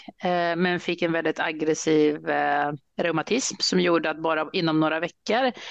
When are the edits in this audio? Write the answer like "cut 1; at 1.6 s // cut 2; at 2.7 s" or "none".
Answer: none